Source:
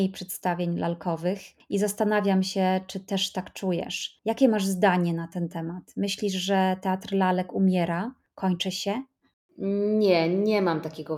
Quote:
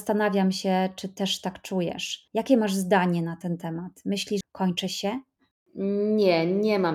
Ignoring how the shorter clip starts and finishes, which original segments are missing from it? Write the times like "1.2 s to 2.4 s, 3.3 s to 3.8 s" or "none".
6.3 s to 8.2 s